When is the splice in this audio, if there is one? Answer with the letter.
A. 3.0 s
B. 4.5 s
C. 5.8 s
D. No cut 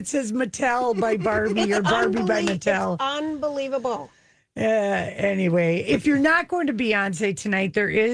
D